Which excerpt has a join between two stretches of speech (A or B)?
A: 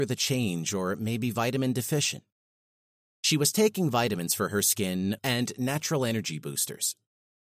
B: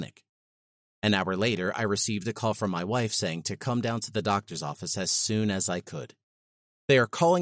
A